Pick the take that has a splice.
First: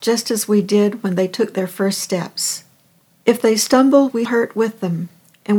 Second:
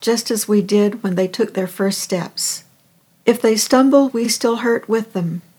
first; 1 cut; at 4.2 s

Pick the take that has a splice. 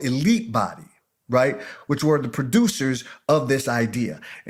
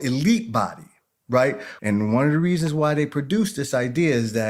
second; 1 cut; at 1.8 s

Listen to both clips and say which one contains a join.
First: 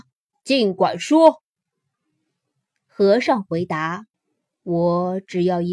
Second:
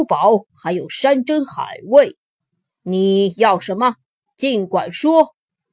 first; 1 cut; at 4.1 s

